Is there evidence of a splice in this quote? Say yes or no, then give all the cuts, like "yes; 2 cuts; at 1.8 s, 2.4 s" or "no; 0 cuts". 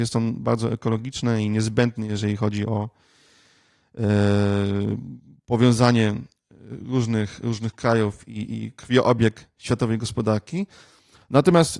no; 0 cuts